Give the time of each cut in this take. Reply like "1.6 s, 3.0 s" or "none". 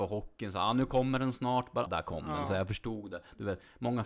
1.9 s